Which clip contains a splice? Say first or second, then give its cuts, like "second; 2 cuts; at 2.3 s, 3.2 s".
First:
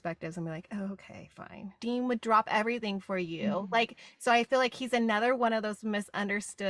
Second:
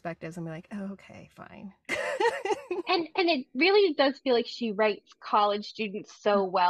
first; 1 cut; at 1.8 s